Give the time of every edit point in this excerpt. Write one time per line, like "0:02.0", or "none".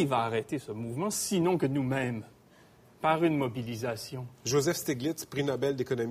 0:04.3